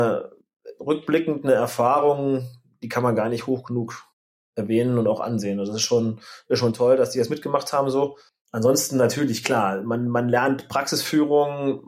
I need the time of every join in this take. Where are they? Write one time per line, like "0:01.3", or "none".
none